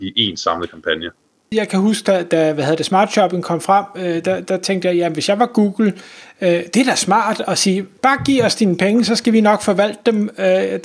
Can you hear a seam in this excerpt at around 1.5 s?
yes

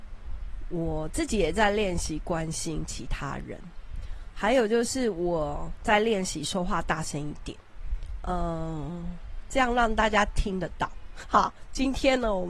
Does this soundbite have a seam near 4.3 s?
no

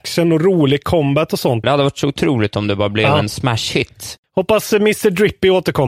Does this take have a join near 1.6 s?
yes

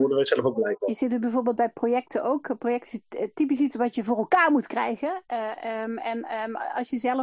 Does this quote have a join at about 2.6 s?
no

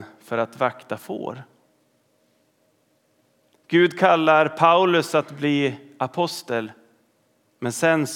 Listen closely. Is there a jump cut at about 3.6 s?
no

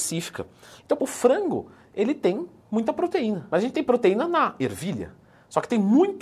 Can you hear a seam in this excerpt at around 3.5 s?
no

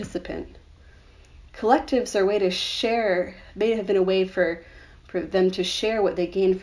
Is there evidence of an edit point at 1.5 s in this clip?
yes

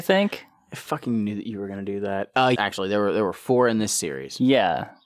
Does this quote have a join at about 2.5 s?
yes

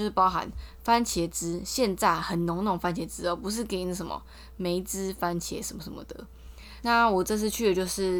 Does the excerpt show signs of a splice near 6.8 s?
yes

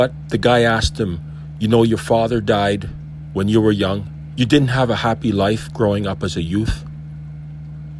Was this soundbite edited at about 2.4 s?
no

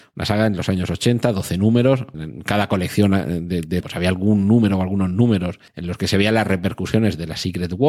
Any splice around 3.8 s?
yes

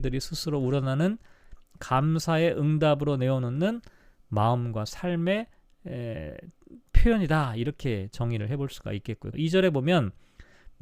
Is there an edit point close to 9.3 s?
yes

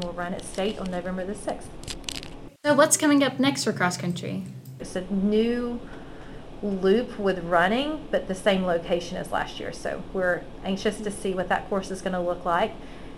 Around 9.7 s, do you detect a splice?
no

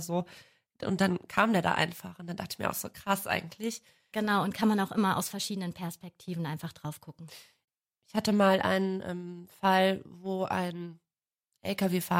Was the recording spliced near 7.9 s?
no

